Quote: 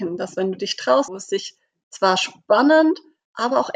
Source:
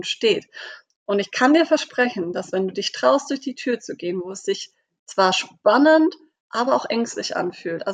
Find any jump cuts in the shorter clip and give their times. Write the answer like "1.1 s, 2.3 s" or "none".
1.1 s